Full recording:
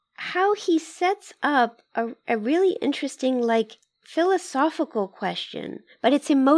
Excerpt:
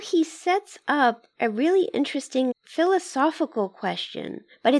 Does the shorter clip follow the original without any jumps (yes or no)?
no